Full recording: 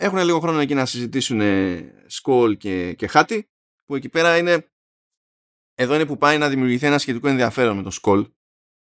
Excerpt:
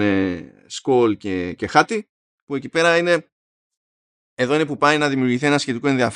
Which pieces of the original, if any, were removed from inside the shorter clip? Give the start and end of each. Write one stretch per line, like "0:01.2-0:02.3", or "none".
none